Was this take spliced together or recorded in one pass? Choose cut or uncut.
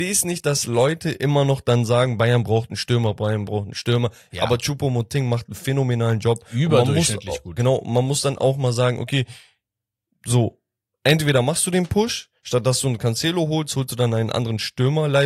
cut